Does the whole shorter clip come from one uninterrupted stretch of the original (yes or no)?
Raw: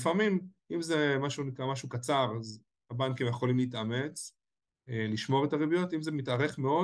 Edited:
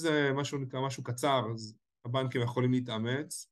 yes